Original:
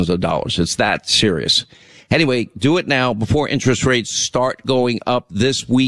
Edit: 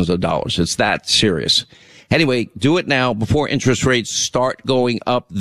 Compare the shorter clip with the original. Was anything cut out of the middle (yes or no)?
no